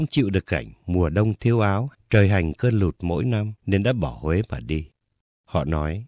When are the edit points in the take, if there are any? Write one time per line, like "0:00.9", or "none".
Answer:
0:01.9
0:03.6